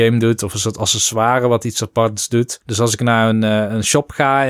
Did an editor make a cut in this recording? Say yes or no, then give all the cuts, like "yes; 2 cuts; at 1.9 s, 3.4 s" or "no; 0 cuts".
yes; 1 cut; at 2.6 s